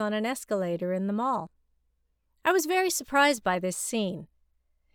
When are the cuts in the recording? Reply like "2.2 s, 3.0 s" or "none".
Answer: none